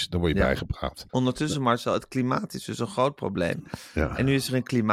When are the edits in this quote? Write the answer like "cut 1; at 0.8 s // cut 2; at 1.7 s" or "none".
cut 1; at 1.1 s